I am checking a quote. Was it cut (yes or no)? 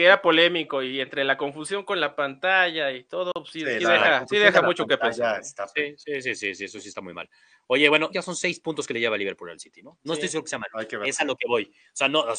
yes